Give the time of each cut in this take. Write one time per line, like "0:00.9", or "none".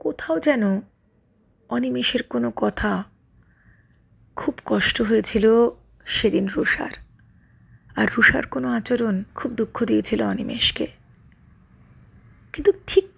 0:09.3